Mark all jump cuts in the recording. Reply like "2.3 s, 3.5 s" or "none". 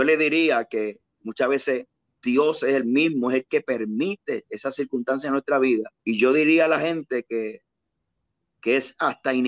2.1 s, 6.0 s